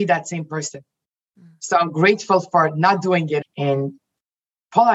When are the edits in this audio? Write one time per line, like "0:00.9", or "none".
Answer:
0:03.4